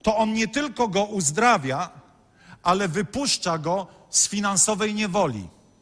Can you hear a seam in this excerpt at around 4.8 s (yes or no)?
no